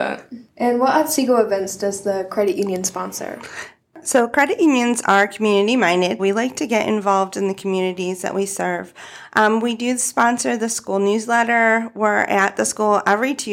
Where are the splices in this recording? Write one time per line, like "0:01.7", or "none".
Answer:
0:06.2